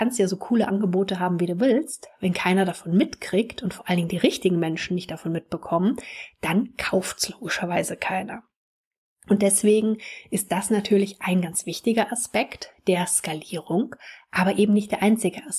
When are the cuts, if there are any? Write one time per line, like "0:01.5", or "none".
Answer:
none